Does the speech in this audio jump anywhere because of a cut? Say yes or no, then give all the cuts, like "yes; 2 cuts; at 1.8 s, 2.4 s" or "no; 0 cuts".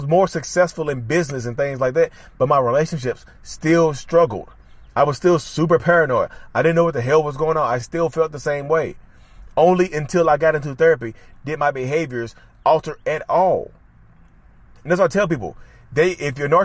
no; 0 cuts